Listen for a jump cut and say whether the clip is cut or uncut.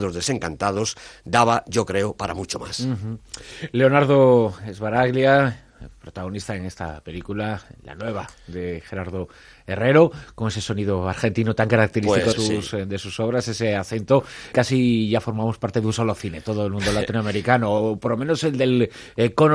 cut